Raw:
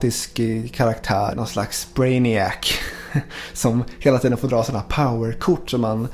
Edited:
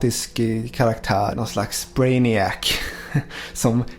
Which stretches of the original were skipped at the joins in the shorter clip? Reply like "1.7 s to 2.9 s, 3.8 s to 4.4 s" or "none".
none

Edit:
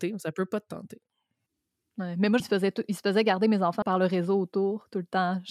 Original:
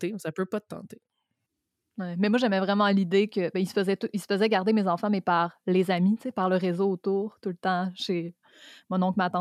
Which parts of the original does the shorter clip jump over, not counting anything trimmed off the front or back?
2.4 s to 3.7 s, 5.1 s to 6.3 s

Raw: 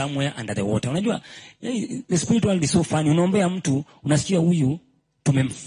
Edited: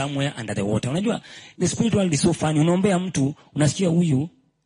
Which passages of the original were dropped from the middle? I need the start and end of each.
1.6 s to 2.1 s

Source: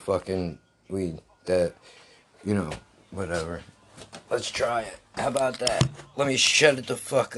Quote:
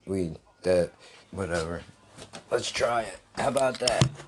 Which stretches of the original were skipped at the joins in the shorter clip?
2.0 s to 3.0 s

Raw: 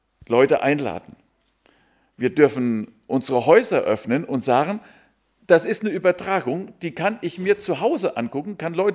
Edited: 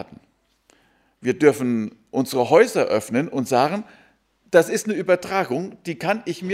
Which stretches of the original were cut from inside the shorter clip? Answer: none

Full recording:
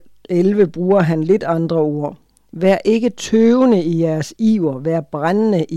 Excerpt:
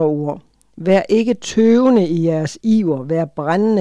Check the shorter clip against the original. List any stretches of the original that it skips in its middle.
none

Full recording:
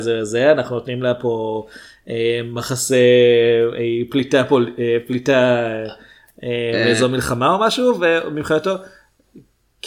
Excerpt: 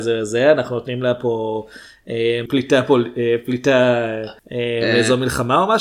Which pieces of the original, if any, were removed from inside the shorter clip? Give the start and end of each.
2.5 s to 4.1 s, 6.0 s to 6.3 s

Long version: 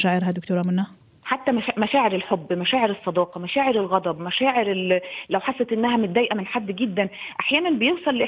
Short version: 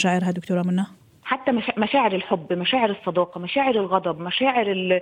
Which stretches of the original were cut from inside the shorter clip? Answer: none

